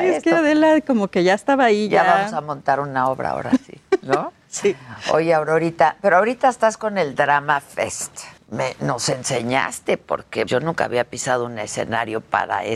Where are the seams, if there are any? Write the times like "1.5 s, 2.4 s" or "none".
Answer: 8.4 s, 10.5 s